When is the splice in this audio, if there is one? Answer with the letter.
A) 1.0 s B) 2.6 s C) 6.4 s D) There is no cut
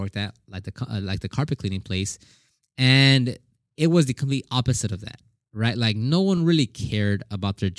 D